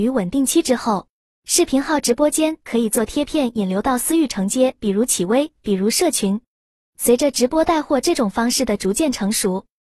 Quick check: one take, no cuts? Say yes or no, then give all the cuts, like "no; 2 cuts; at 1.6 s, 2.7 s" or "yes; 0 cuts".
yes; 0 cuts